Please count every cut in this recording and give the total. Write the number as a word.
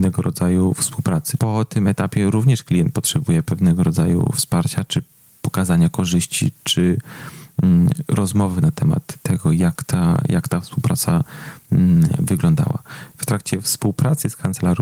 two